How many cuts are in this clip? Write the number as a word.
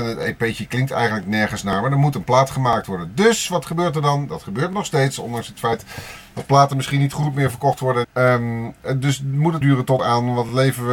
two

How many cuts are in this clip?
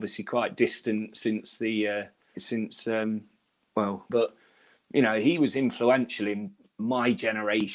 two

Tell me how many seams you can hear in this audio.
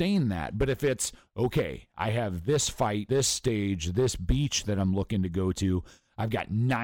one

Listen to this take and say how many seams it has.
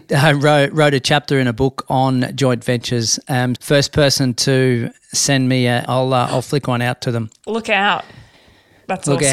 two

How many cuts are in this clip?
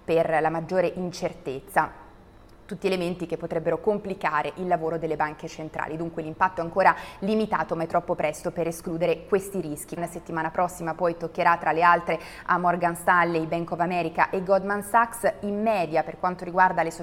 one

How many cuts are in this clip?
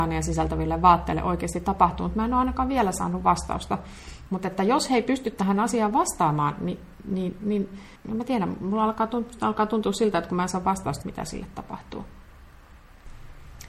three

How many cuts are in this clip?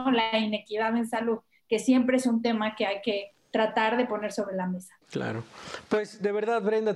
one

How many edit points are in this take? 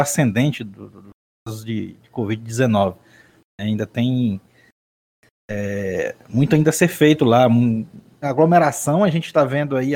one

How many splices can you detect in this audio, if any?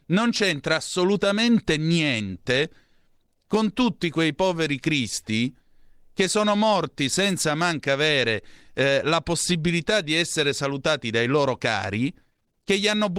zero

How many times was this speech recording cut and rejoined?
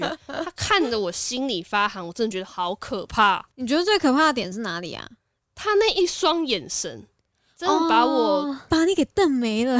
one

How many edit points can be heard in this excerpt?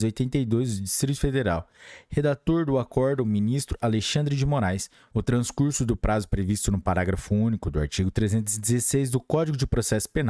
two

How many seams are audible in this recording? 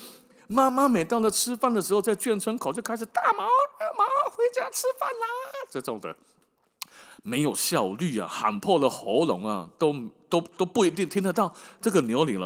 zero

